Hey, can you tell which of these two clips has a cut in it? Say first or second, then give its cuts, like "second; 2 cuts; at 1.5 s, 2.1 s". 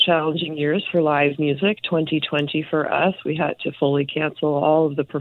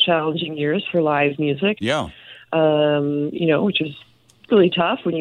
second; 1 cut; at 1.8 s